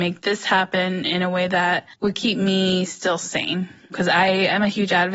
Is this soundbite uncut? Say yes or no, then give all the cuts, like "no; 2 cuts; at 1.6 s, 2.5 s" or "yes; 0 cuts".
no; 1 cut; at 1.9 s